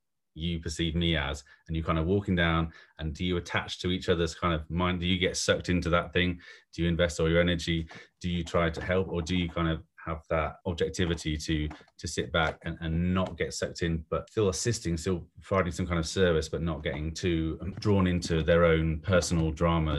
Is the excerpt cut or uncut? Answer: uncut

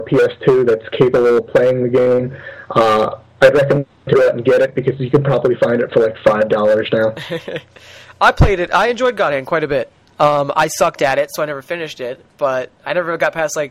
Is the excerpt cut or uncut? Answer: uncut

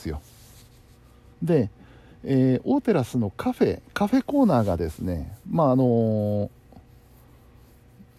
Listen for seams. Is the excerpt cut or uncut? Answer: cut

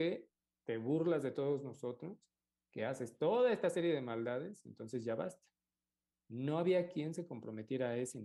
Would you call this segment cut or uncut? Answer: uncut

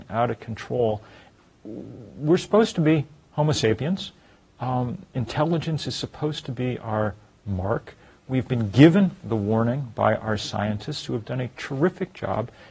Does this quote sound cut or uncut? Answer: uncut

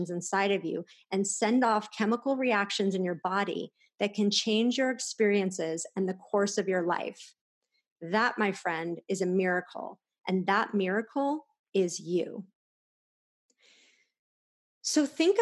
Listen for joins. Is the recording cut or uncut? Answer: uncut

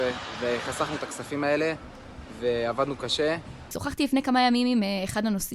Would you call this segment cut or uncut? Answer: cut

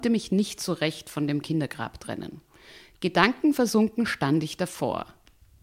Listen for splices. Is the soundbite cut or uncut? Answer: uncut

